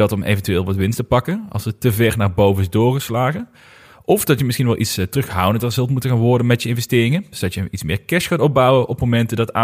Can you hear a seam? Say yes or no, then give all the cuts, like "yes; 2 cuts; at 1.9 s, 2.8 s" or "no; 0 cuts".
no; 0 cuts